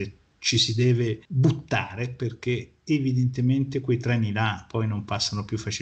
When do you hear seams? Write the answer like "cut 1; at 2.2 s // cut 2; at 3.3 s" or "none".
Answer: cut 1; at 1.3 s